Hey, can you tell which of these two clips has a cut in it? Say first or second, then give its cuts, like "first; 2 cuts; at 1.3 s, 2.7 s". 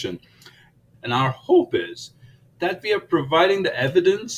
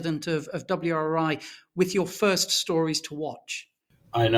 first; 1 cut; at 0.9 s